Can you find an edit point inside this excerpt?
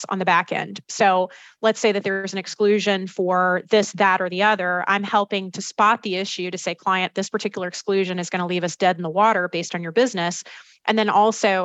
no; 0 cuts

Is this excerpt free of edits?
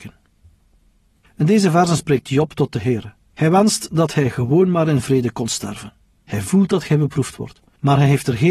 no; 2 cuts; at 3.3 s, 6.2 s

